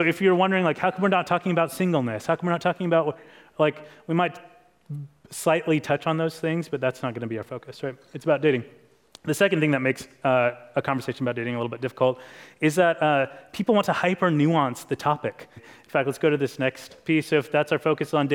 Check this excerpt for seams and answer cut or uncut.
cut